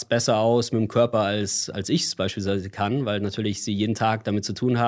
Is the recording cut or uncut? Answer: uncut